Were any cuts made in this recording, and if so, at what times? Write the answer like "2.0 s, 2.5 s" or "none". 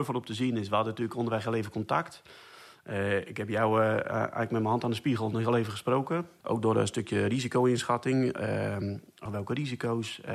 6.4 s, 9.3 s

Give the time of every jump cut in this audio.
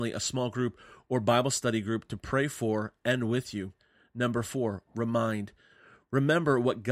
none

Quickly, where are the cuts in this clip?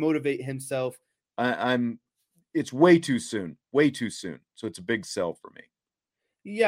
1.3 s

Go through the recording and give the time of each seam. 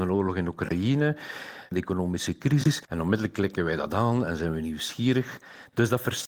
2.9 s

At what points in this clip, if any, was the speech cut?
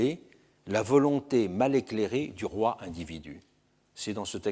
none

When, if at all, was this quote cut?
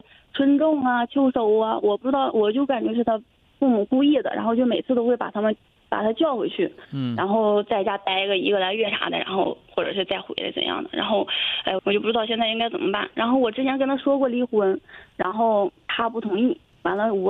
11.8 s

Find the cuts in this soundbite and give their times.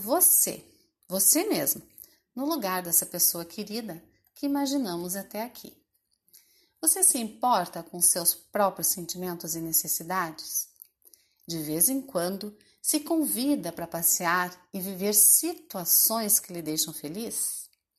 none

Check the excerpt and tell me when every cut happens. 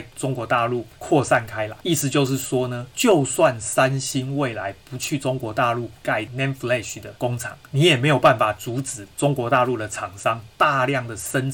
none

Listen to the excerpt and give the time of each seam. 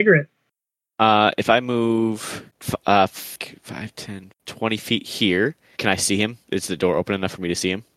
2.5 s, 4.3 s, 5.8 s

